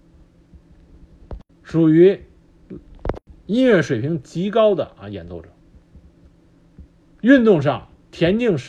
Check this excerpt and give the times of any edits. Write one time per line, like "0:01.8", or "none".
0:01.5